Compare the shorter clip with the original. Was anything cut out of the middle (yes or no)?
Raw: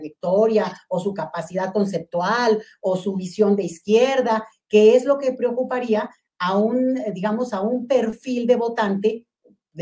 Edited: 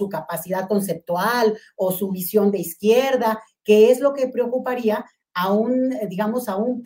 no